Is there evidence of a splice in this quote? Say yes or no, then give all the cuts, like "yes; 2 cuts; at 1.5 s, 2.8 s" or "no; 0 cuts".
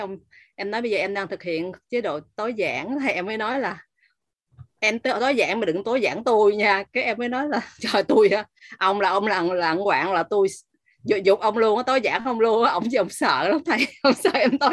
no; 0 cuts